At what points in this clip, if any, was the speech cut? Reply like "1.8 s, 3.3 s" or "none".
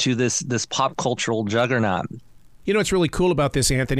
2.6 s